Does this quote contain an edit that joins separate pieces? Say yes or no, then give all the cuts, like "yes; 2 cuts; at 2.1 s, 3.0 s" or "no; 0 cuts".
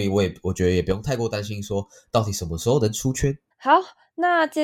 yes; 1 cut; at 3.5 s